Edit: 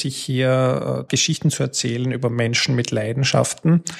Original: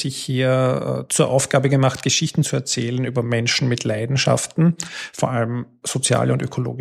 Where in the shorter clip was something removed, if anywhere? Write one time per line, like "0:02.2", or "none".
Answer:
0:01.1

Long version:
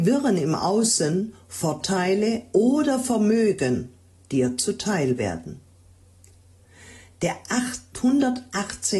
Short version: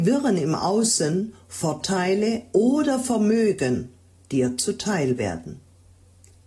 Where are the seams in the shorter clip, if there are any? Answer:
none

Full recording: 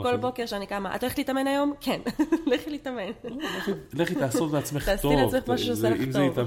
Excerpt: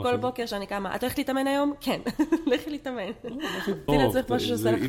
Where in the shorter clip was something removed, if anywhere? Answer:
0:03.9

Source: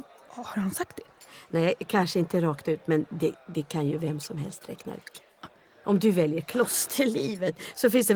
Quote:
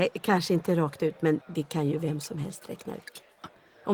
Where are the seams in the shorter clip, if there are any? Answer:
0:01.4

